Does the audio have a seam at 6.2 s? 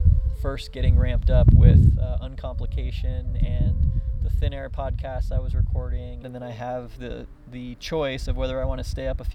yes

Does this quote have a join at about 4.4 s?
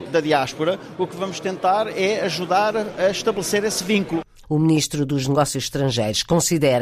yes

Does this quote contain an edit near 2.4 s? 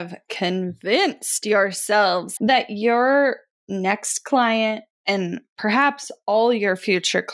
yes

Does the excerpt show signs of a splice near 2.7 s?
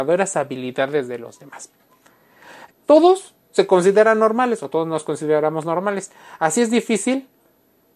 yes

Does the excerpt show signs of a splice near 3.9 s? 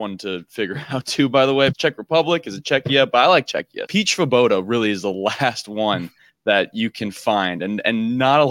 yes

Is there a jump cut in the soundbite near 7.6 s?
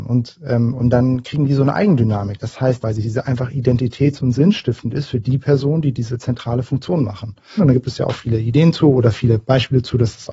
yes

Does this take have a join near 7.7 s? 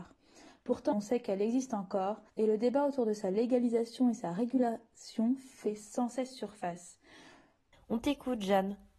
yes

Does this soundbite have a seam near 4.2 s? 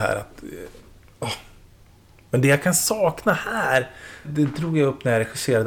yes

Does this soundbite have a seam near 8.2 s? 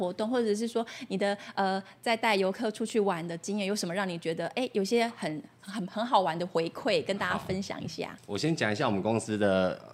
yes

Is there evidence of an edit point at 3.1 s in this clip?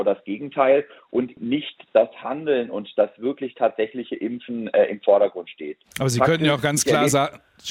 no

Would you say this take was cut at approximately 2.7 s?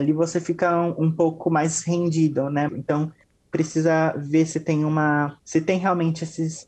yes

